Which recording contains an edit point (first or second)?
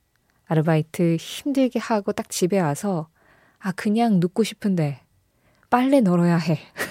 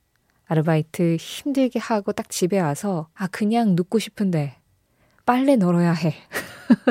second